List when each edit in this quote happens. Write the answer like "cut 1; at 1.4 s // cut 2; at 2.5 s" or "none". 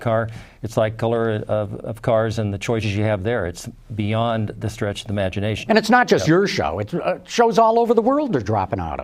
cut 1; at 1.8 s // cut 2; at 5.6 s